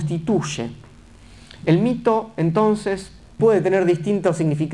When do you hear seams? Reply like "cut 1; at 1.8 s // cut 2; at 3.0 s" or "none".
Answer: cut 1; at 3.4 s

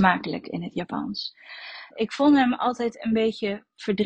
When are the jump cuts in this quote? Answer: cut 1; at 1.9 s

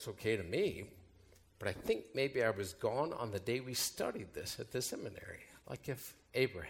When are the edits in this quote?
cut 1; at 5.6 s

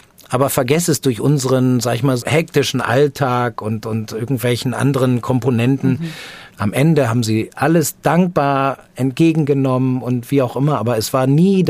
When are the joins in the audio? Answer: cut 1; at 2.2 s // cut 2; at 6.5 s // cut 3; at 8.0 s

